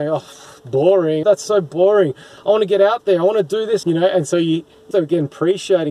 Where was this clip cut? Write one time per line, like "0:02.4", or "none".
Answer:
0:01.2
0:03.8
0:04.9

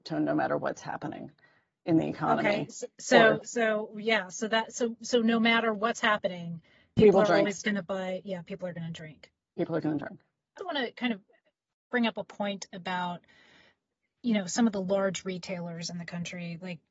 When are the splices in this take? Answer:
0:10.6

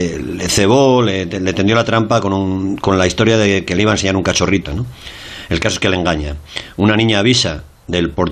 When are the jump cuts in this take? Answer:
0:04.7

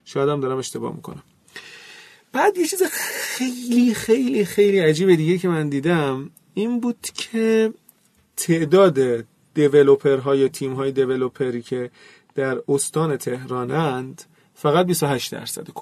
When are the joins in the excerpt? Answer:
none

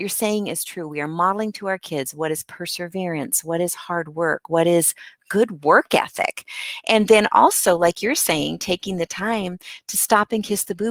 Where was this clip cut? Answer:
none

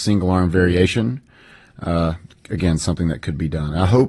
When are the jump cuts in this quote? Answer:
none

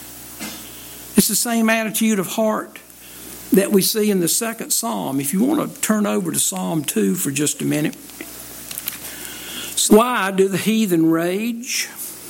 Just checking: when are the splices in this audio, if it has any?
0:09.9

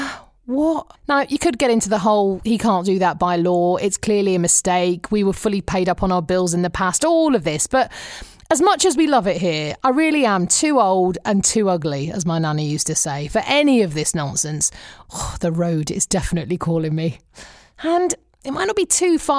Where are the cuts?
0:01.0
0:15.0

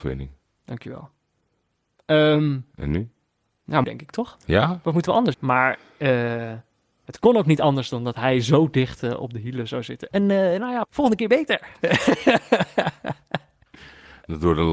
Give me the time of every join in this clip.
0:03.8
0:05.3
0:10.8

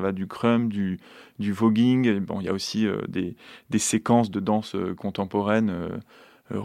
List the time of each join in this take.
none

